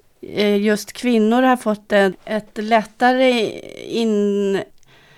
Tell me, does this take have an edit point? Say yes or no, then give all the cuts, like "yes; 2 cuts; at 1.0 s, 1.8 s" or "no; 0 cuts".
no; 0 cuts